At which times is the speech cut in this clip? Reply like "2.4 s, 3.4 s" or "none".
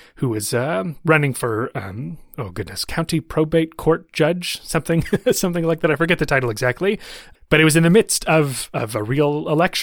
none